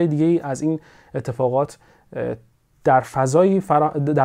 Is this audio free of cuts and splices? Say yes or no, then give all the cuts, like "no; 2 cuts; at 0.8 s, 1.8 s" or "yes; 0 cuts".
yes; 0 cuts